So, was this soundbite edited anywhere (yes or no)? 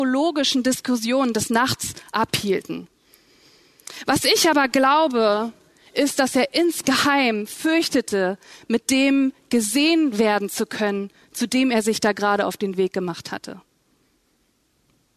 no